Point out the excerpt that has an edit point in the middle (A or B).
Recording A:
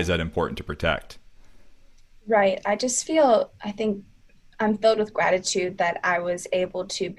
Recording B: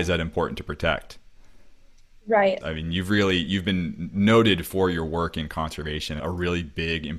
B